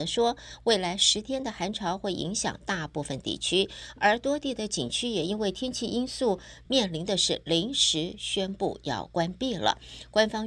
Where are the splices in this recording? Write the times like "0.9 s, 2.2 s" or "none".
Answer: 6.7 s